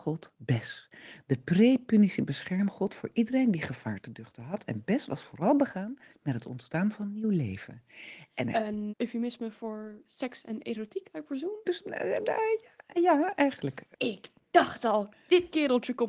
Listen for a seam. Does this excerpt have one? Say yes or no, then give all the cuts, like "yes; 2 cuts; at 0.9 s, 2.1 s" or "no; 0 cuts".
yes; 2 cuts; at 8.9 s, 11.6 s